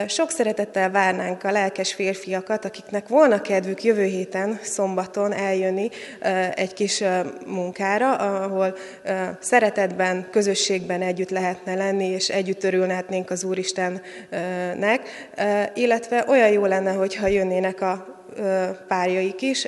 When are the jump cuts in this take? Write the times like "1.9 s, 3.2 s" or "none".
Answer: none

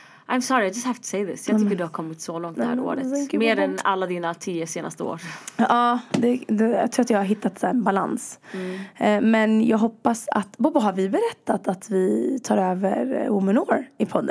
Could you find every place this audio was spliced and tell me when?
none

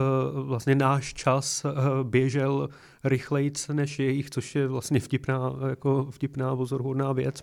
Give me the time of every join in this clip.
none

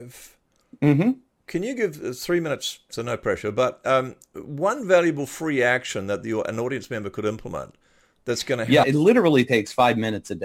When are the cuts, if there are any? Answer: 2.9 s, 8.8 s

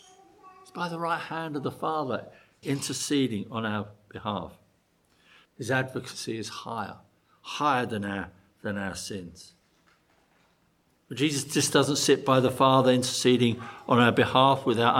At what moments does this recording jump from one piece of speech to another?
2.6 s, 5.4 s

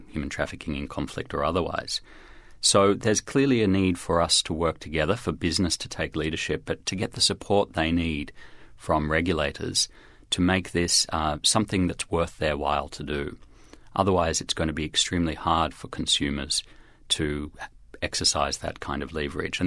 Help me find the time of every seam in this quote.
none

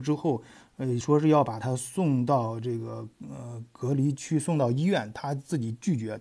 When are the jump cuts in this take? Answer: none

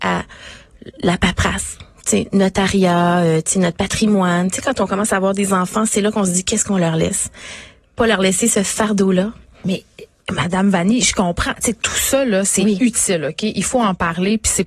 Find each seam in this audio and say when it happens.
none

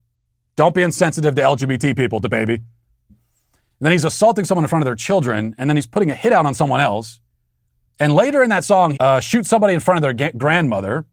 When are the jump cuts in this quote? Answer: 3.1 s, 8.9 s

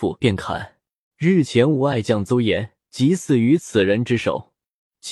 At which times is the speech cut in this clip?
1.1 s, 2.8 s

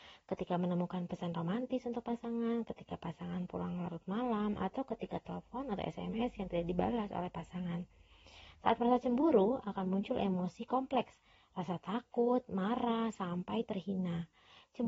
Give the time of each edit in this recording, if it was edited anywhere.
none

